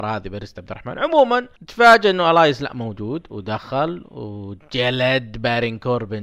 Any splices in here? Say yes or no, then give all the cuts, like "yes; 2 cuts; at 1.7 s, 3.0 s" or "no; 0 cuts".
yes; 1 cut; at 1.5 s